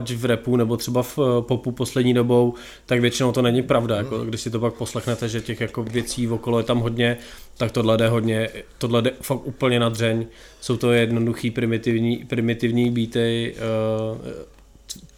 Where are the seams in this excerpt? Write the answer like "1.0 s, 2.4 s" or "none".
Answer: none